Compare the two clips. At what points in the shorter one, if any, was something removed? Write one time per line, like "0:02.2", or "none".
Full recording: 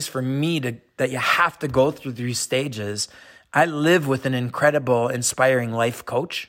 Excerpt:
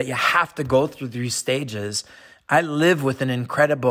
none